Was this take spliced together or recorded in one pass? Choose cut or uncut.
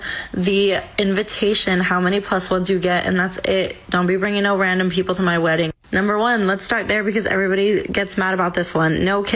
cut